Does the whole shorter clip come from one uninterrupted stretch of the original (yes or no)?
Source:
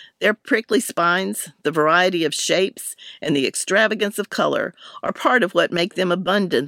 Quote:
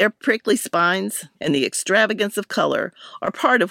no